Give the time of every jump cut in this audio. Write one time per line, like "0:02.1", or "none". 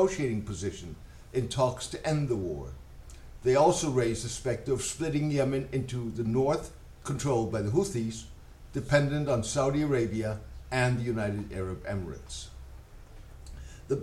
0:08.7